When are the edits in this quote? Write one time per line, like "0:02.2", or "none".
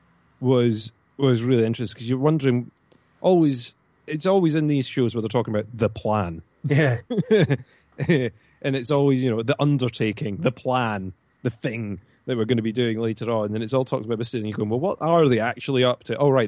none